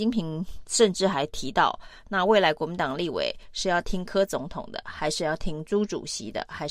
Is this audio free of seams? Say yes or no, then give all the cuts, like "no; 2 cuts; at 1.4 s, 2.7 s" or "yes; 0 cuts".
yes; 0 cuts